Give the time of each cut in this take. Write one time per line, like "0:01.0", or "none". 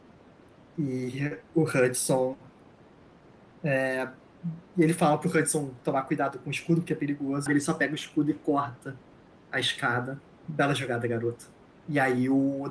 0:07.5
0:10.4
0:11.7